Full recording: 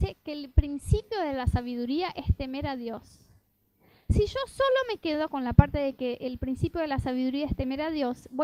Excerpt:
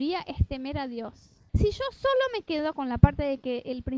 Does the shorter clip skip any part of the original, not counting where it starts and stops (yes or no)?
yes